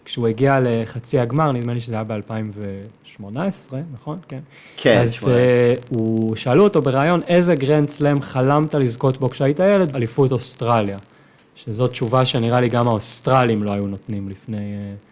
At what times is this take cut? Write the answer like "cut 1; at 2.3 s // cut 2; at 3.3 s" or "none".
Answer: cut 1; at 9.9 s